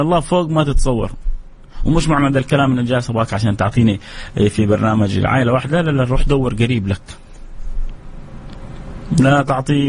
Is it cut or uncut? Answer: uncut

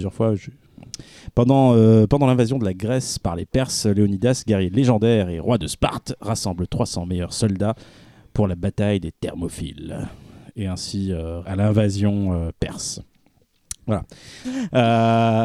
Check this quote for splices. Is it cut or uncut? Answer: cut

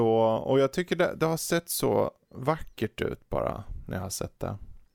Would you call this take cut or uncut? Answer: uncut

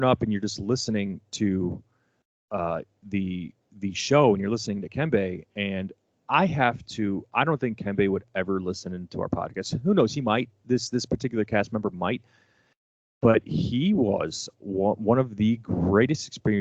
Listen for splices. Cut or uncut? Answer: uncut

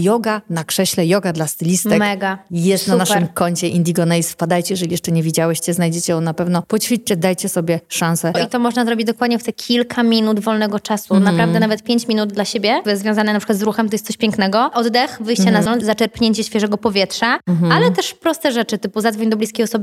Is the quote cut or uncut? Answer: cut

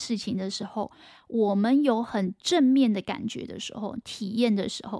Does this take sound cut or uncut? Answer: cut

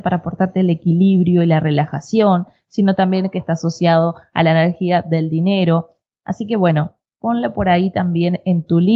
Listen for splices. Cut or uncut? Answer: uncut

